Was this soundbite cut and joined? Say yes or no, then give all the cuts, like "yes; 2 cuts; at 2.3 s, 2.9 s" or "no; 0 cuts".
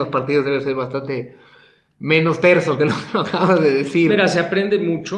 no; 0 cuts